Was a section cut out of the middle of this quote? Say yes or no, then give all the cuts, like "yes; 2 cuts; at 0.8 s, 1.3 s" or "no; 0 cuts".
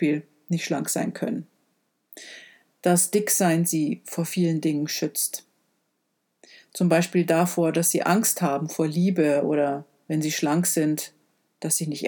no; 0 cuts